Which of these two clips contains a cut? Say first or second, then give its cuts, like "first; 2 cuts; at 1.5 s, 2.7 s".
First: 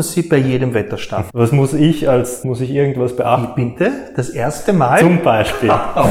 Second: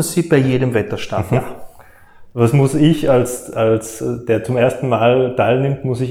first; 2 cuts; at 1.3 s, 2.4 s